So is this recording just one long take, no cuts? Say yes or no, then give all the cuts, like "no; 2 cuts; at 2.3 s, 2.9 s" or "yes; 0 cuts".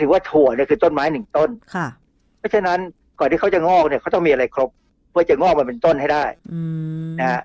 yes; 0 cuts